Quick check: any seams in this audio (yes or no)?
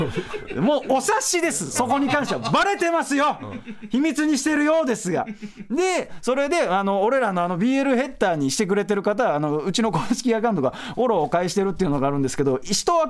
no